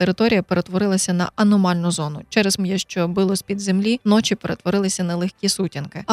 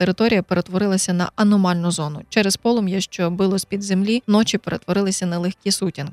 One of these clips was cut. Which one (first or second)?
first